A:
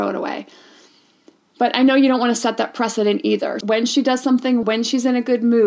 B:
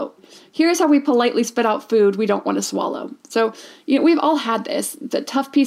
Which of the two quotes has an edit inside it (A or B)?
A